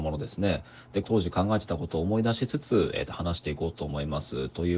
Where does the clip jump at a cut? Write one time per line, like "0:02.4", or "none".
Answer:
0:01.0